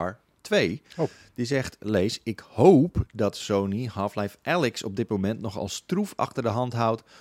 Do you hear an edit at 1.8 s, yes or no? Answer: yes